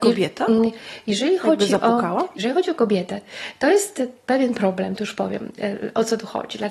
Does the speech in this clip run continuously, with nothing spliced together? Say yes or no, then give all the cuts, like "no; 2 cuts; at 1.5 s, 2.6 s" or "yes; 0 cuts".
yes; 0 cuts